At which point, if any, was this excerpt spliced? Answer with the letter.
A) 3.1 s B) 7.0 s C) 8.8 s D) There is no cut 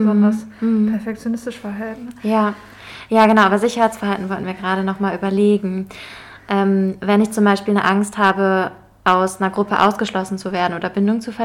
D